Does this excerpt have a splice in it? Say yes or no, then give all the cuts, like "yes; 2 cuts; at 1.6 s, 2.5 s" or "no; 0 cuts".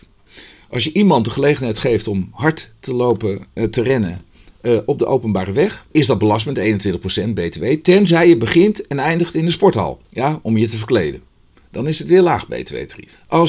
yes; 1 cut; at 5.9 s